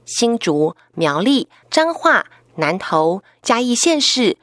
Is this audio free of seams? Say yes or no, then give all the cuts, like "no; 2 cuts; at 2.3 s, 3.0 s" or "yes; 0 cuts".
no; 2 cuts; at 1.6 s, 3.4 s